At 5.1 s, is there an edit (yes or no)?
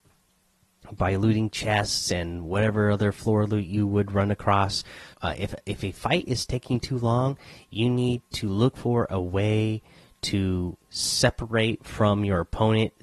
yes